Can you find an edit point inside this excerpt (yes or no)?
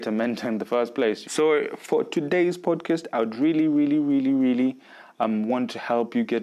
yes